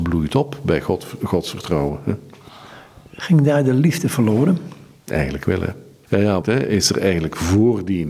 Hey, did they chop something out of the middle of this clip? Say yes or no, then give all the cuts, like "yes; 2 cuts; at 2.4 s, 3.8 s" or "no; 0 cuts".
yes; 1 cut; at 6.4 s